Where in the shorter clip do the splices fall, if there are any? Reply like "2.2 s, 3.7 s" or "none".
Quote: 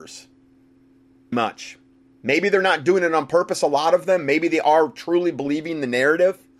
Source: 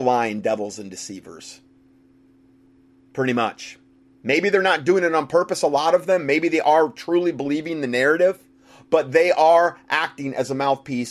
1.3 s